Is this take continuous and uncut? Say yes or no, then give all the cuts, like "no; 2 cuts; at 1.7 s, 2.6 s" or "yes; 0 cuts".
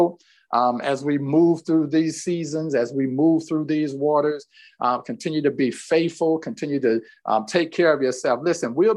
yes; 0 cuts